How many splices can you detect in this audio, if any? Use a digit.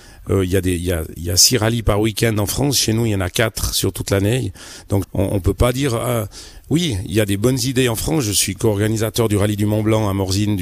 1